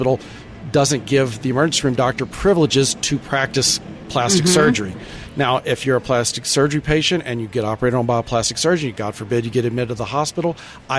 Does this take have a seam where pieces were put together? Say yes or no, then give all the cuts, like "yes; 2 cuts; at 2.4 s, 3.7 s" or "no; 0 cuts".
no; 0 cuts